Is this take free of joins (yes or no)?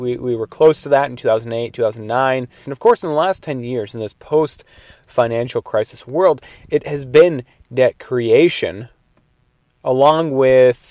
no